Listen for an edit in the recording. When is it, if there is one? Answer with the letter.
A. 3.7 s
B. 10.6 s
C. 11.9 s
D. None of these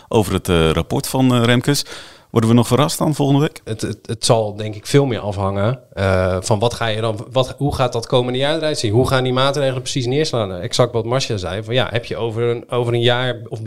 A